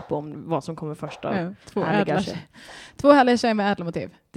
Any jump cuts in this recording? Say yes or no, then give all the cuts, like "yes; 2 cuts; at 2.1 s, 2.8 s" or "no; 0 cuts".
yes; 1 cut; at 1.6 s